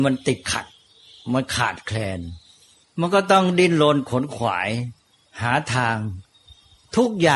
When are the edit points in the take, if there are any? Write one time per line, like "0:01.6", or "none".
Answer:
none